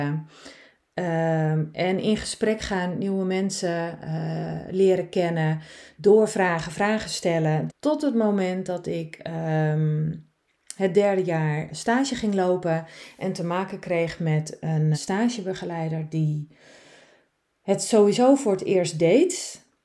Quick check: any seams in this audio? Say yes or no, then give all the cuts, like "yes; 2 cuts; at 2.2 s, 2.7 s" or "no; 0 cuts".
yes; 3 cuts; at 7.7 s, 11.7 s, 14.9 s